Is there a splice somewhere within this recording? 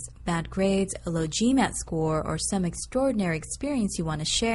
no; 0 cuts

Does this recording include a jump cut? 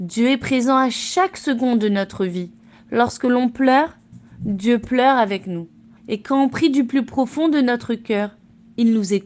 yes; 1 cut; at 6.0 s

